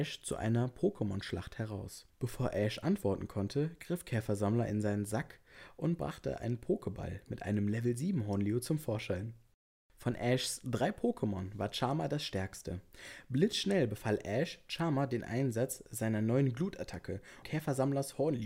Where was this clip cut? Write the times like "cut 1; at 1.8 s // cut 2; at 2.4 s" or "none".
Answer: cut 1; at 17.4 s

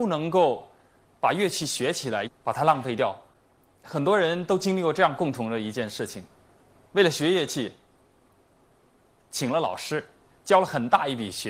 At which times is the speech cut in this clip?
cut 1; at 2.3 s

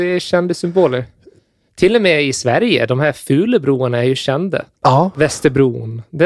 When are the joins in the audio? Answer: cut 1; at 4.7 s

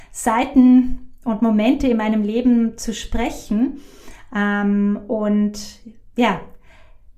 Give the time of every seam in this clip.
cut 1; at 4.3 s

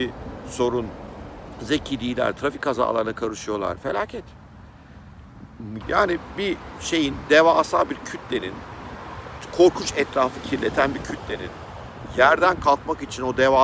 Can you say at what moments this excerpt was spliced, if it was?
cut 1; at 5.8 s

